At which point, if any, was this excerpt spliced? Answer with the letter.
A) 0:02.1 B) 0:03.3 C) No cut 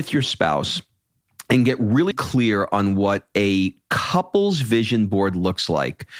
A